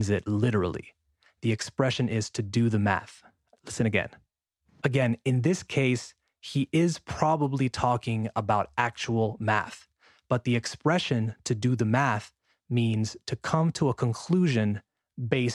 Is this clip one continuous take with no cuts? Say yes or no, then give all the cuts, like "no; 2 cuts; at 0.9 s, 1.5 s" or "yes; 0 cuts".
no; 1 cut; at 4.8 s